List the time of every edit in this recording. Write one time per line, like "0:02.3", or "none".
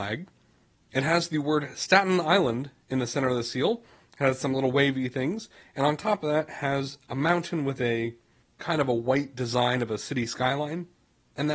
none